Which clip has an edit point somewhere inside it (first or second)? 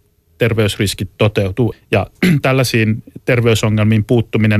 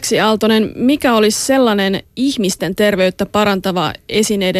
first